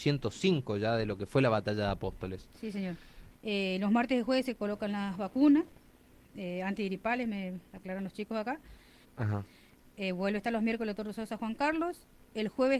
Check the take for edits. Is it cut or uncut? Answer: cut